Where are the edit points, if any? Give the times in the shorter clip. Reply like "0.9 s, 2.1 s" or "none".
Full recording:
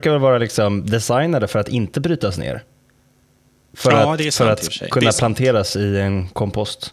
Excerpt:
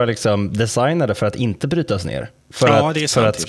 2.4 s

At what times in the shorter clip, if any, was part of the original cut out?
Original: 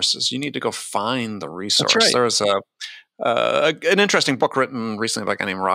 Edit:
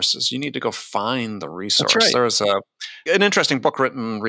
3.1 s

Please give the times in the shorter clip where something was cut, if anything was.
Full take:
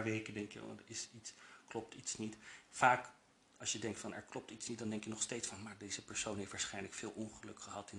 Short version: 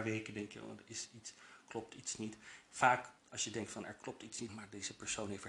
3.2 s, 4.5 s

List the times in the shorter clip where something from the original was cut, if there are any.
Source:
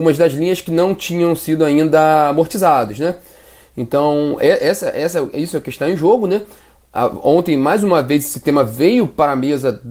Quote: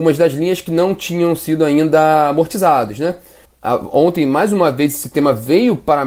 3.5 s

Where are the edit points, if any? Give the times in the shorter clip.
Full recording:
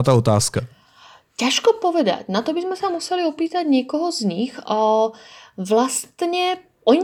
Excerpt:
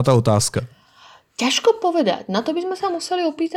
none

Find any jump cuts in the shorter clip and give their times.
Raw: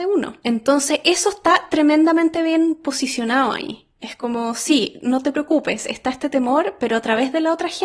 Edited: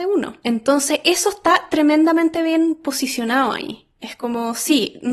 none

